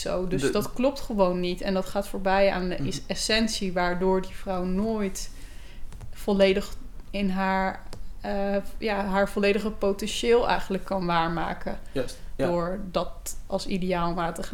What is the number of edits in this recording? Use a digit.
2